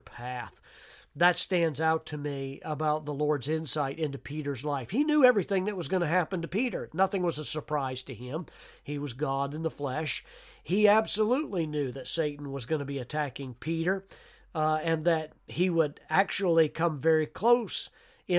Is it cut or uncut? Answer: uncut